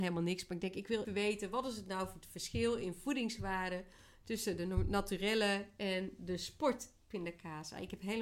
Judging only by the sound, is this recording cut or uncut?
cut